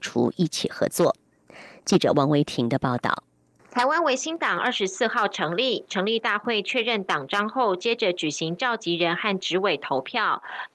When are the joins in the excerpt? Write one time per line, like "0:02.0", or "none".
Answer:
none